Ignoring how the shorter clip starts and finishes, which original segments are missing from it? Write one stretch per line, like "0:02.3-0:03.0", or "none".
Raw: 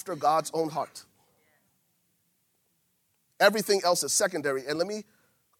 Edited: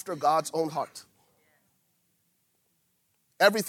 none